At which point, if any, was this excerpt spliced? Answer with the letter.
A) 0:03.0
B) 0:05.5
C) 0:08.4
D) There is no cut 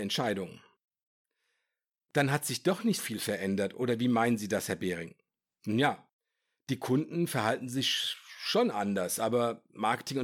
A